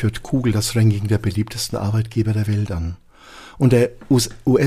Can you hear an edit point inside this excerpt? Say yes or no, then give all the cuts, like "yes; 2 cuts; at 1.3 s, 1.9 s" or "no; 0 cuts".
no; 0 cuts